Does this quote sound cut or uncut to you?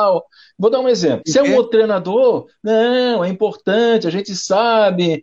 cut